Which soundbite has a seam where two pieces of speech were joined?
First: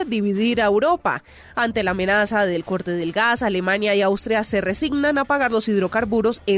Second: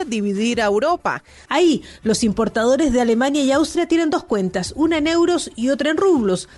second; 1 cut; at 1.5 s

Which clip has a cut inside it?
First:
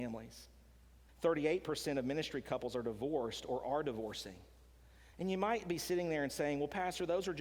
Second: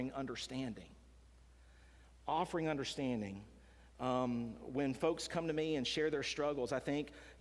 first; 2 cuts; at 1.1 s, 5.1 s

